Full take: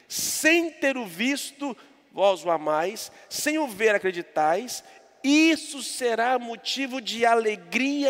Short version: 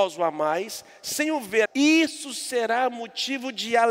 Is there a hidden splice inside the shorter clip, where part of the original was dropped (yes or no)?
yes